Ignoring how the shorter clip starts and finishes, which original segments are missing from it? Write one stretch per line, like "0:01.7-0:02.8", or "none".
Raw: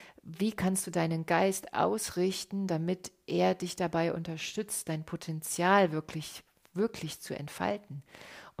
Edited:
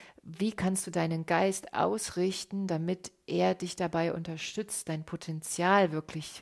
none